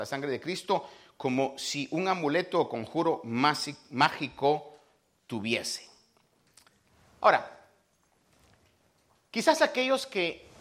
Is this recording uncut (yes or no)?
yes